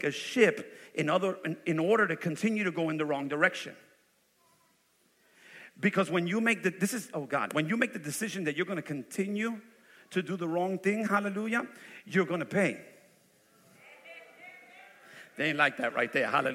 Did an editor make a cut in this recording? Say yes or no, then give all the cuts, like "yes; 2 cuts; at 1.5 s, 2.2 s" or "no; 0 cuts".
no; 0 cuts